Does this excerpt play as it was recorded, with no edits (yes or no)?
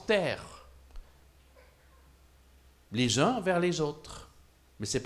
yes